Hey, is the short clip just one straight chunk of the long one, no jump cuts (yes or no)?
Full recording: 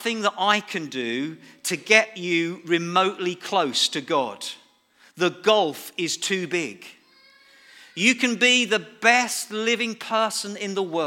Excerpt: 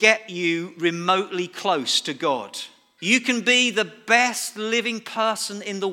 no